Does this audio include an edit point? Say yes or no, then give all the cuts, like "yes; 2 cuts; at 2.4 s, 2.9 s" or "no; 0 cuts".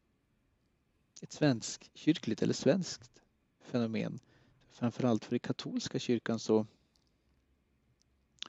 no; 0 cuts